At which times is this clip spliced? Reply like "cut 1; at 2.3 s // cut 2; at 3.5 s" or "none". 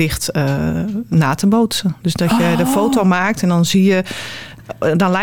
none